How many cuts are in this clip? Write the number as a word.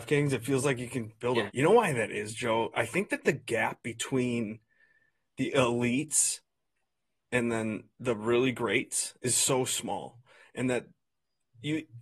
one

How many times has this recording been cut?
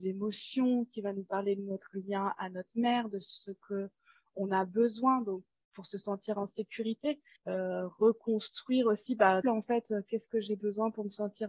two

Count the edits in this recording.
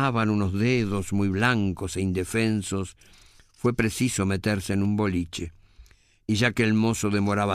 zero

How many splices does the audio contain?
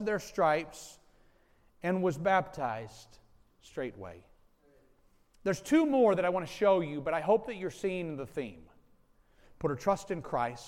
two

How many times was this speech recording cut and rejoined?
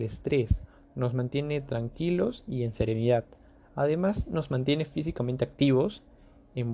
zero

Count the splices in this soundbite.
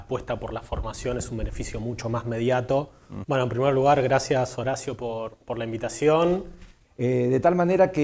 two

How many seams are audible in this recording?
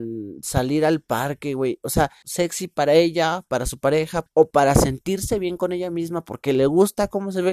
two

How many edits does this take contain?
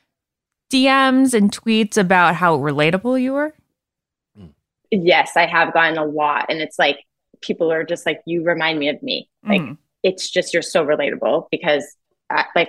zero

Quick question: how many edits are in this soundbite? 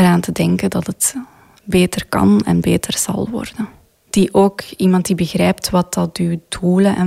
one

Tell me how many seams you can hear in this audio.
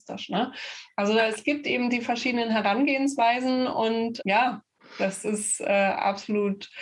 zero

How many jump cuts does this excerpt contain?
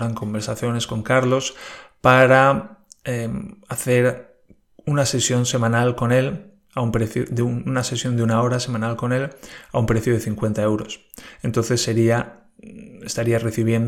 zero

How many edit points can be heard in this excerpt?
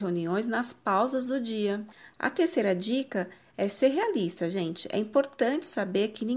zero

